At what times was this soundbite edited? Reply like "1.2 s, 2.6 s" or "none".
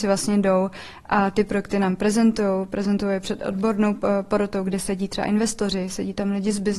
none